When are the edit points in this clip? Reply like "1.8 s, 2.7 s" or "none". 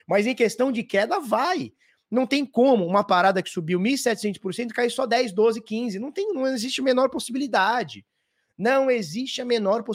none